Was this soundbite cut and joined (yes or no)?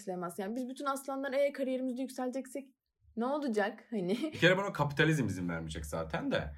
no